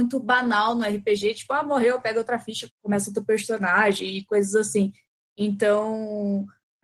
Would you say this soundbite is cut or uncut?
cut